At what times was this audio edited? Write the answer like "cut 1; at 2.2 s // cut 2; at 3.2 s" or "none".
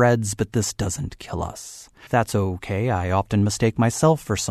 cut 1; at 2.1 s